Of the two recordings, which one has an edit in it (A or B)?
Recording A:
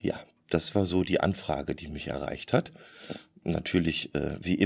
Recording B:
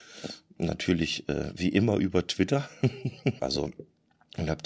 B